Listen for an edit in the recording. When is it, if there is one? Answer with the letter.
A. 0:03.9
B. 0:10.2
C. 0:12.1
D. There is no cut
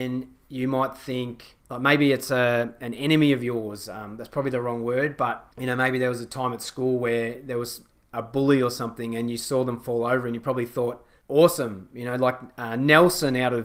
D